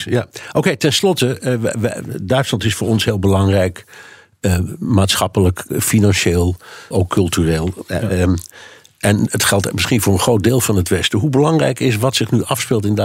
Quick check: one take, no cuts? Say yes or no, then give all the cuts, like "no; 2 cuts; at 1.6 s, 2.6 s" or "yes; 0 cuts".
no; 1 cut; at 6.9 s